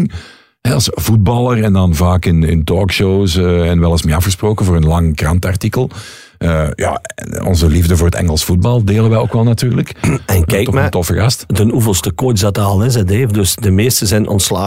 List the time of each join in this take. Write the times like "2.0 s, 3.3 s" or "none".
none